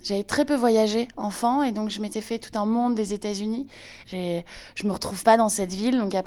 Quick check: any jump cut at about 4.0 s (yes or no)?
yes